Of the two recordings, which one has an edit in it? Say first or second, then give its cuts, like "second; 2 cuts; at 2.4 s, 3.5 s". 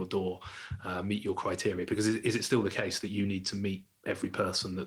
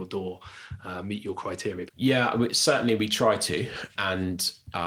second; 2 cuts; at 1.9 s, 4.0 s